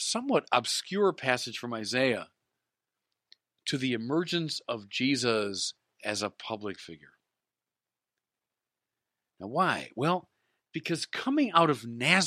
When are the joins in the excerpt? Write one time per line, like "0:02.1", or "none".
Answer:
none

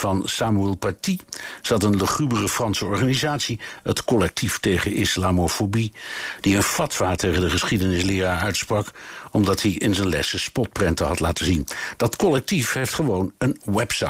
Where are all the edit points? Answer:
none

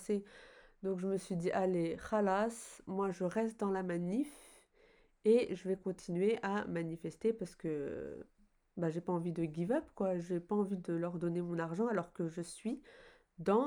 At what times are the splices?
none

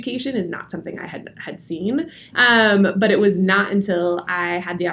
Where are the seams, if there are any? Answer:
0:02.3

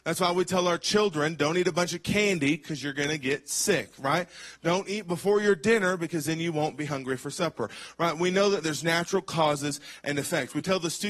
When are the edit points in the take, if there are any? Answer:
none

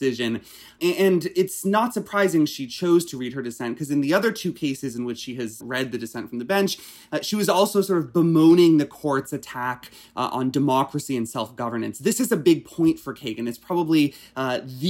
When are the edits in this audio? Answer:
0:05.6

